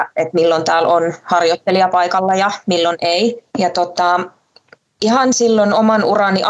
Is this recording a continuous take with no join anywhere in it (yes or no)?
no